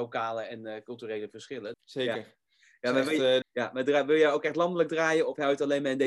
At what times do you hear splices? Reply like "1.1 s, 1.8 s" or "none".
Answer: 1.7 s, 3.4 s